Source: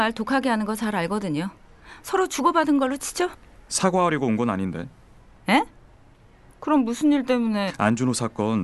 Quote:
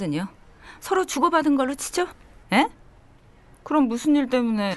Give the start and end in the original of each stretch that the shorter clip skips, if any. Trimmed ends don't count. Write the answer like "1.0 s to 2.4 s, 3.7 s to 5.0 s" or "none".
3.6 s to 5.4 s